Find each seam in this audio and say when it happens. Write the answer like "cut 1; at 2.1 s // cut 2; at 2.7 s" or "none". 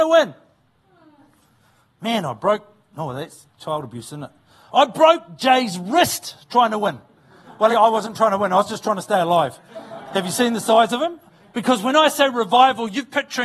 cut 1; at 7.7 s // cut 2; at 11.5 s